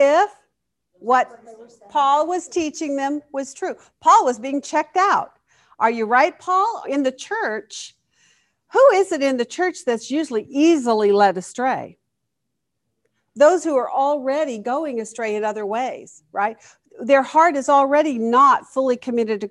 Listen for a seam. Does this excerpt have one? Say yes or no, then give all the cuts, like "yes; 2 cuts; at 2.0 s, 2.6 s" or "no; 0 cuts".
yes; 1 cut; at 6.8 s